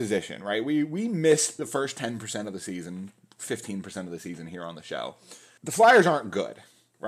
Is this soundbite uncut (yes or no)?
no